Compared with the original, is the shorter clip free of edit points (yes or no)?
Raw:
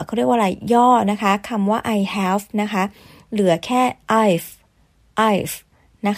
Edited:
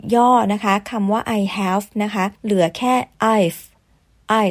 no